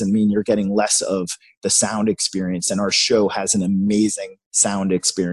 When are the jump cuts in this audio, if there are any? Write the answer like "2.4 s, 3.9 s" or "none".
none